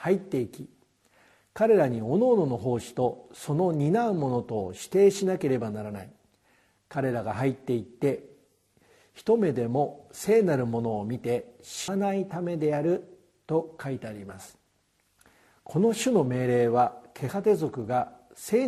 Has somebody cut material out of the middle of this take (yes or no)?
yes